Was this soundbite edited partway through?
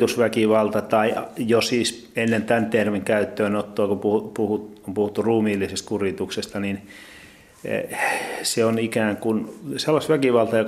no; 0 cuts

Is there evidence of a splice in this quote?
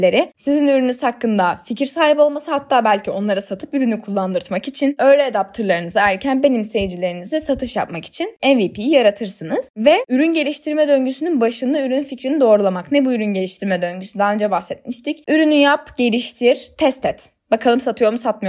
yes; 1 cut; at 5.0 s

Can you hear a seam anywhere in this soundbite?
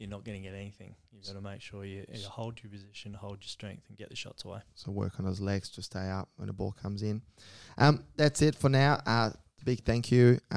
yes; 1 cut; at 9.6 s

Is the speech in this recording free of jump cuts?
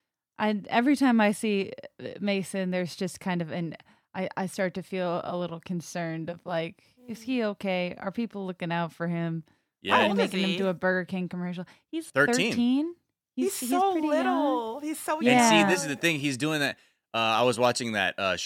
no; 1 cut; at 12.1 s

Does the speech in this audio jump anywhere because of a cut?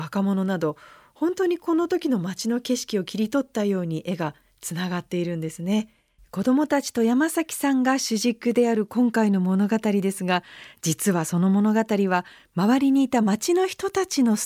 yes; 1 cut; at 6.2 s

